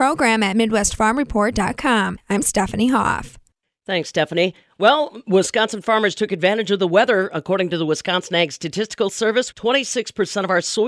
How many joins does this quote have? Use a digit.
1